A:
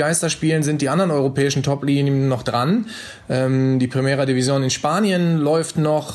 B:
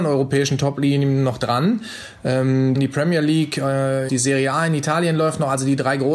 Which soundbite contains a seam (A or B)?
B